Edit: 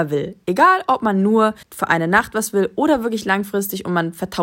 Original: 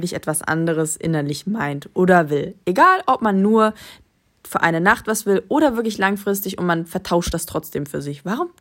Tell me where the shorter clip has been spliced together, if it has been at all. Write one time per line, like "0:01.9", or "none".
0:01.6